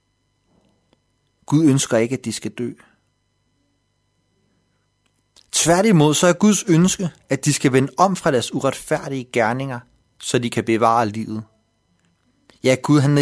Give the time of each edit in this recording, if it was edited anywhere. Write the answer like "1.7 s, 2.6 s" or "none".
none

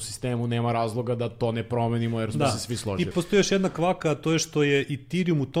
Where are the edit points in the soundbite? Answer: 3.1 s

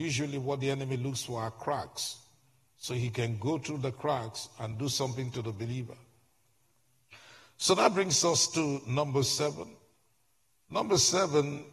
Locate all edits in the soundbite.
none

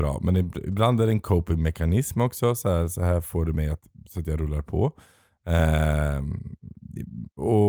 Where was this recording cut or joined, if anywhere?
none

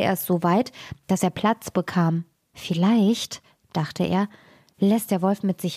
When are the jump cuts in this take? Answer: 2.4 s

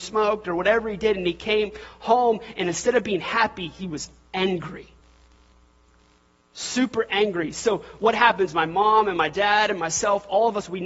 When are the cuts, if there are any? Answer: none

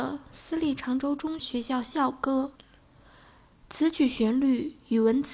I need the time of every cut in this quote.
1.4 s, 2.6 s

